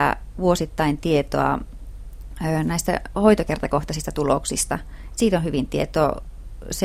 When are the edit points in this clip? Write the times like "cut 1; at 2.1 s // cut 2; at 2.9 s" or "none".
none